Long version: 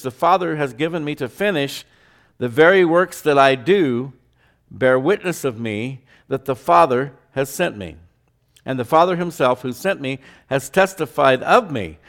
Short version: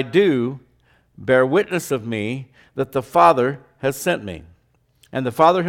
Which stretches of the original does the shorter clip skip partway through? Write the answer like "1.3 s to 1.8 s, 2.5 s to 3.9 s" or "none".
none